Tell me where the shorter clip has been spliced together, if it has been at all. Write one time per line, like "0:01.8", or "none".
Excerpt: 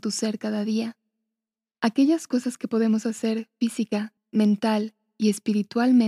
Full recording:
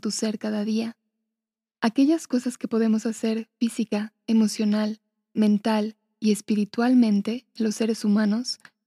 0:04.2